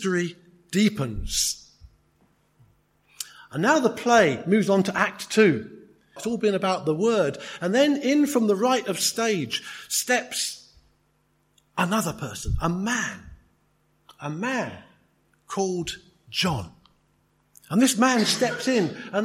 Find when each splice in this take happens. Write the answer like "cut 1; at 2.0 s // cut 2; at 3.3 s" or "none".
cut 1; at 6.2 s